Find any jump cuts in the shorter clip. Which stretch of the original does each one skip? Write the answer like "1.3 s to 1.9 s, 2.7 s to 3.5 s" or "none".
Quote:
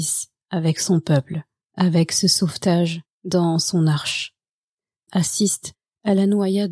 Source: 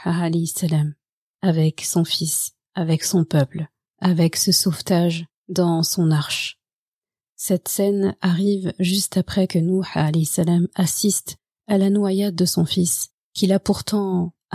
7.3 s to 10.7 s